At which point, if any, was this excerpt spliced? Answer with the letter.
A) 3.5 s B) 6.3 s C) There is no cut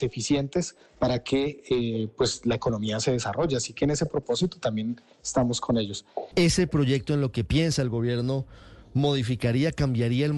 B